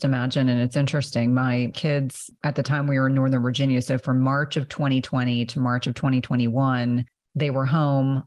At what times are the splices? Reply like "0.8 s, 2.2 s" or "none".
none